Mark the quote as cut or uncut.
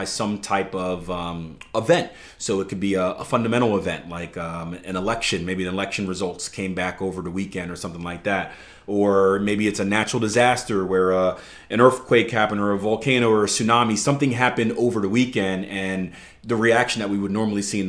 uncut